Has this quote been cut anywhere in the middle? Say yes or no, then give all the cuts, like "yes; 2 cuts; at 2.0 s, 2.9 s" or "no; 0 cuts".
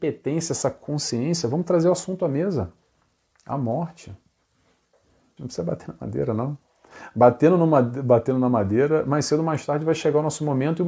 yes; 1 cut; at 5.4 s